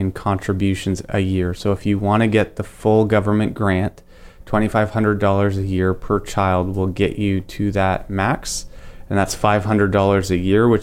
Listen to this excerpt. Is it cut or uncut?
uncut